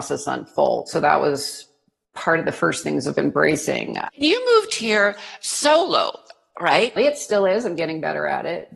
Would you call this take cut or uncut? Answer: cut